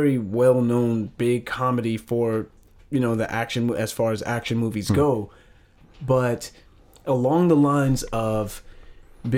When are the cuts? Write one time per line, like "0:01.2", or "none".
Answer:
none